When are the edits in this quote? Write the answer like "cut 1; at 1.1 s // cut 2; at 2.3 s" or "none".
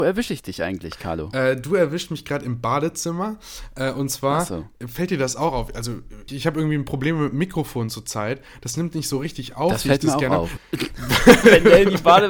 cut 1; at 6.3 s // cut 2; at 10.6 s

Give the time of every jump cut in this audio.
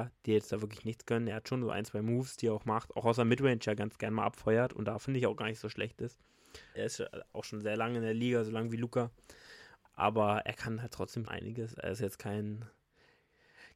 cut 1; at 6.8 s // cut 2; at 9.9 s // cut 3; at 11.3 s

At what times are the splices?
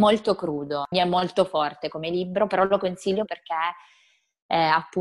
cut 1; at 0.9 s // cut 2; at 3.3 s

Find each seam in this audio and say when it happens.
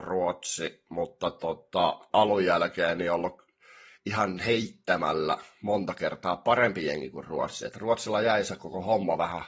cut 1; at 2.1 s

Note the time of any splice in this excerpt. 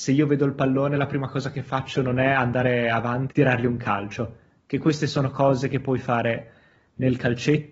cut 1; at 3.3 s

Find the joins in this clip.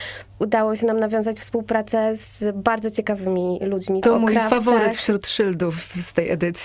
cut 1; at 4.0 s

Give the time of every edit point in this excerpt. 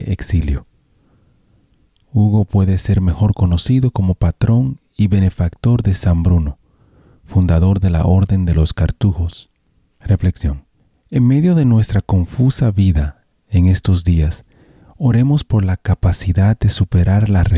cut 1; at 9.9 s

